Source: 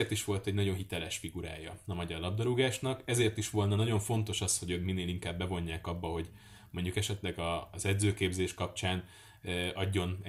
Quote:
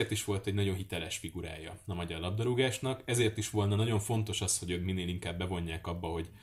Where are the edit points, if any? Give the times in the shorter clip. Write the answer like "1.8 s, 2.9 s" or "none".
none